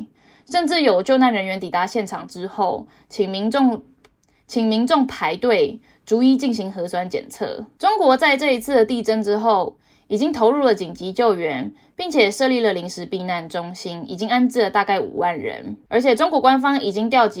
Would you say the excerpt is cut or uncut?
uncut